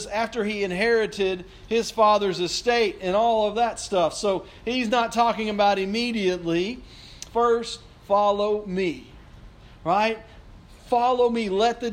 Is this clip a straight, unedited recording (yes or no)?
no